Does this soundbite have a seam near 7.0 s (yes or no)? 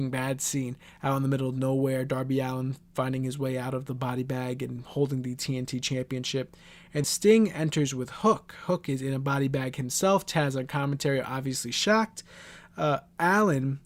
yes